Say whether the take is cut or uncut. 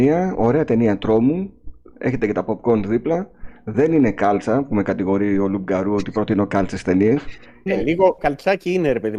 cut